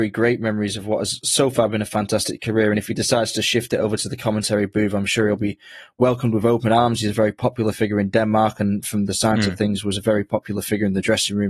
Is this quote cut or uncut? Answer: uncut